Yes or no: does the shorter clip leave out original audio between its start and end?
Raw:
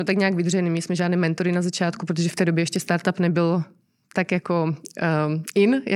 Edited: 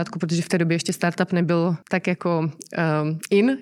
yes